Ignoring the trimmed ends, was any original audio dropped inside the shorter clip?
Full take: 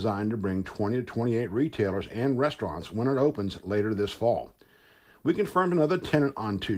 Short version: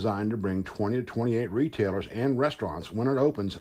no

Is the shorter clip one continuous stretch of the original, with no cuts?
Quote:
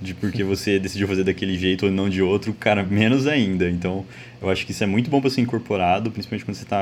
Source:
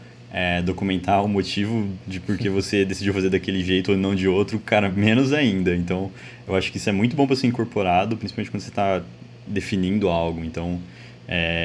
yes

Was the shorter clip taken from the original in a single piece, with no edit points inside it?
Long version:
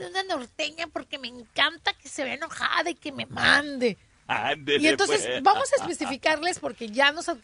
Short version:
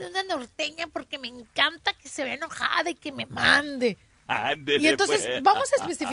yes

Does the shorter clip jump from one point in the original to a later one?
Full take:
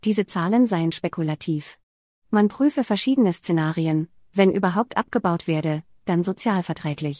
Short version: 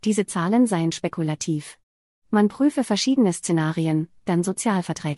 yes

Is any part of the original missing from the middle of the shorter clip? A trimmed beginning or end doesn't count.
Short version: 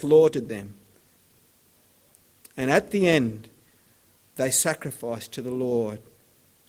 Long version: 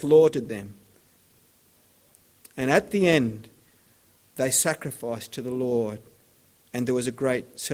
no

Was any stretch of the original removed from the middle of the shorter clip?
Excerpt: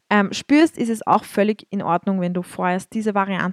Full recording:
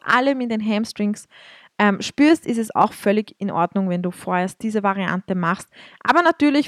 no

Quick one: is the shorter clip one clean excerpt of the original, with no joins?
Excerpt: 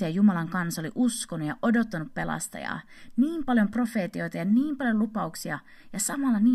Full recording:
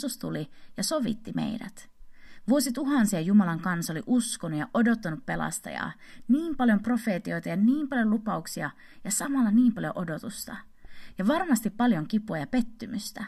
yes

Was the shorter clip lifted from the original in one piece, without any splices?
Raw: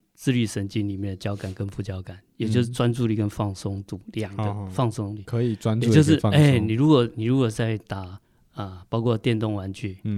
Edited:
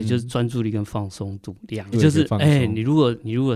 no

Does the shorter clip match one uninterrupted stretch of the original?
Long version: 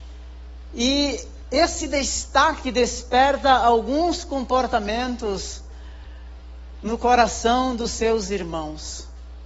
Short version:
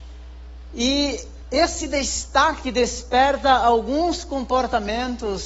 yes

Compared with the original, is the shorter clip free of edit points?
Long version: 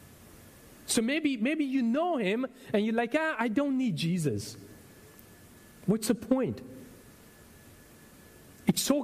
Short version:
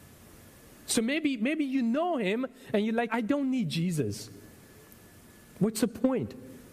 no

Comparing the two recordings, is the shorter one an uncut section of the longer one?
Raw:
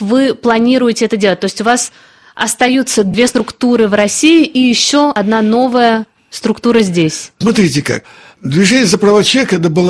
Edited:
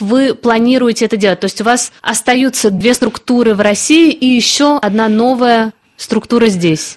no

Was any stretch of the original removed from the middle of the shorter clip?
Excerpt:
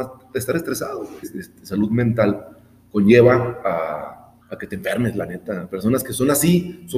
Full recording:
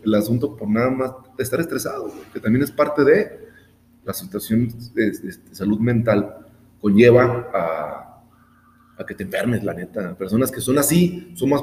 yes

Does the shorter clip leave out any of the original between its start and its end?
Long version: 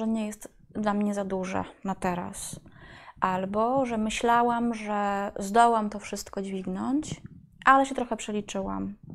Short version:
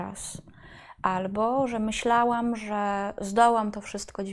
no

